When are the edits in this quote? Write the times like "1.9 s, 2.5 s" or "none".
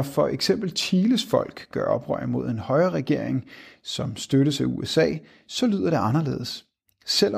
none